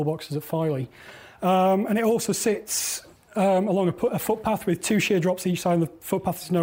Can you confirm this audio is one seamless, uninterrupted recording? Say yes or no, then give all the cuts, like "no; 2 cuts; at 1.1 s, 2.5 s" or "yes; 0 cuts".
yes; 0 cuts